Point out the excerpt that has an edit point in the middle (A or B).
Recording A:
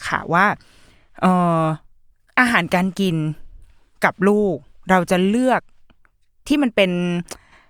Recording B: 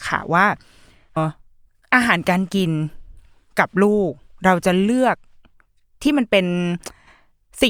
B